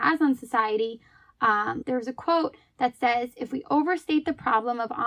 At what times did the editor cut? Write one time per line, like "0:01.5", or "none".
0:01.8